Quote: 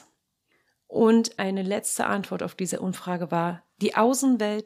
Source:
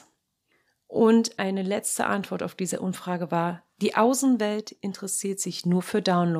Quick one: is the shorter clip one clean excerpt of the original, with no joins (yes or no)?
yes